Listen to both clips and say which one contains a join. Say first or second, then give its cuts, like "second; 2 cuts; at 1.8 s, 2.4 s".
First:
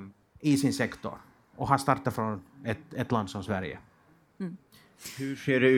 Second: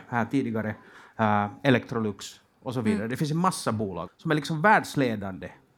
second; 1 cut; at 4.1 s